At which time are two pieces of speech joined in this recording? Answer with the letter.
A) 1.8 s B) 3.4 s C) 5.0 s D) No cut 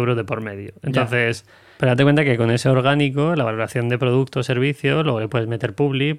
A